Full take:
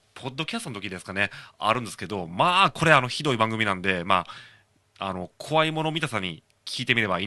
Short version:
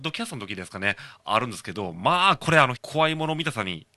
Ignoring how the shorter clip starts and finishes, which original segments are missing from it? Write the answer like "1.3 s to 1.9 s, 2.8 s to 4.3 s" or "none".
3.1 s to 5.3 s